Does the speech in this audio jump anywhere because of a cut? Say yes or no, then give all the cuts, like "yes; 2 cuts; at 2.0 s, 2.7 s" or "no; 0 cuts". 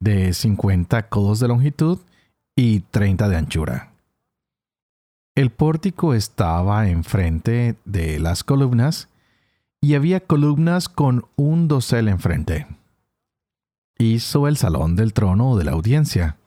no; 0 cuts